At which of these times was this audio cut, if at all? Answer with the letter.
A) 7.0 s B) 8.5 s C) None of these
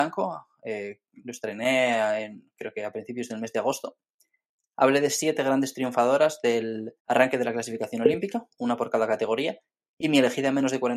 A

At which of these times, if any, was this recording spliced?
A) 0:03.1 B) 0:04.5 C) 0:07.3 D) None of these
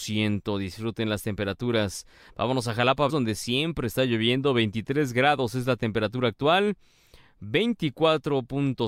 A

